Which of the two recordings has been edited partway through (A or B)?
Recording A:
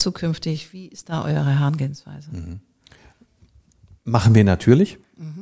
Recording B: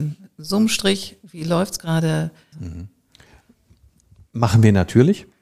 B